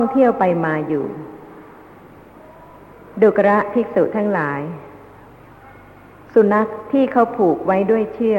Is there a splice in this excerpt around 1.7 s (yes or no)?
no